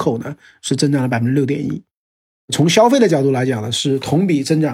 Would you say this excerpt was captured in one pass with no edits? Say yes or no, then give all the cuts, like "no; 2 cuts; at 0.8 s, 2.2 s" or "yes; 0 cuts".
yes; 0 cuts